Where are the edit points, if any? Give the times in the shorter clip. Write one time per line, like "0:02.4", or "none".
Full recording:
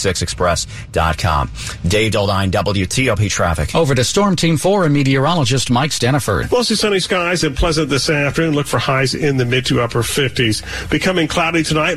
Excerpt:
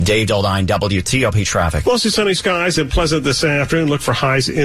0:01.8